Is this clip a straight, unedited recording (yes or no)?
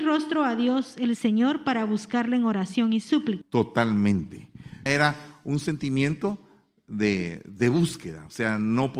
no